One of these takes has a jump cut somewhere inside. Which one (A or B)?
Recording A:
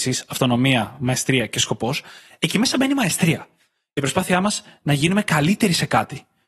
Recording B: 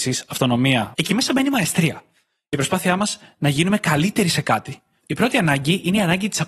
B